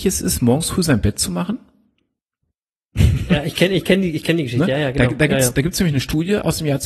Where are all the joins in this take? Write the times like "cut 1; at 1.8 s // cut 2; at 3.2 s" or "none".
none

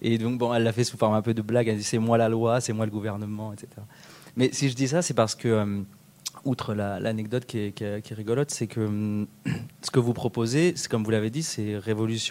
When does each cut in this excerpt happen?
none

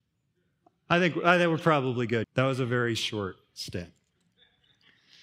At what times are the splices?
cut 1; at 2.2 s

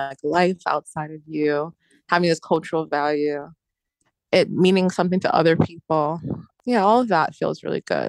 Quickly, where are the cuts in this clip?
none

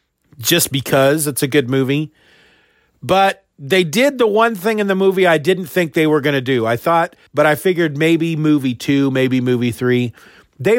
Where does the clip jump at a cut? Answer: cut 1; at 7.3 s

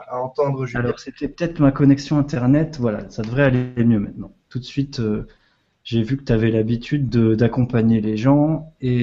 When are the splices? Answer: cut 1; at 4.5 s

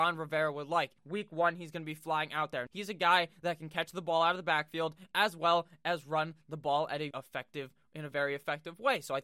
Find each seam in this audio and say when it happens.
cut 1; at 1.0 s // cut 2; at 2.7 s // cut 3; at 7.1 s

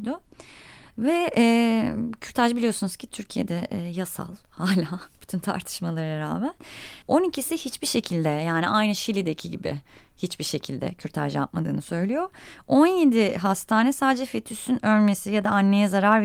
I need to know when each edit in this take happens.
cut 1; at 7.0 s

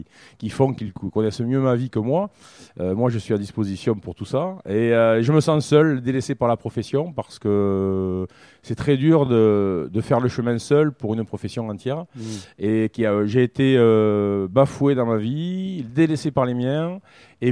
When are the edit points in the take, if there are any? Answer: none

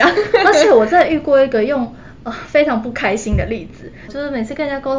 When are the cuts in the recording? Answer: cut 1; at 4.1 s

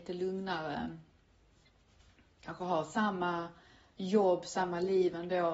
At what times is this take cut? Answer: none

